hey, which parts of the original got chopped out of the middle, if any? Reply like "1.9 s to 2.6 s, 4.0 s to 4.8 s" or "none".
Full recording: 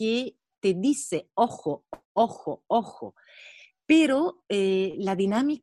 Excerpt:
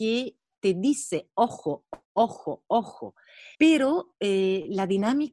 3.5 s to 3.8 s